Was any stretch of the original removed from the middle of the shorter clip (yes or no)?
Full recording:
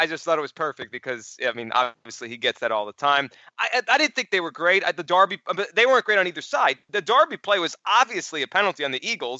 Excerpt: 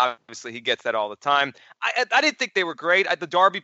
no